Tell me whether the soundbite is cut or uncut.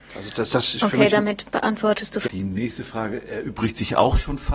cut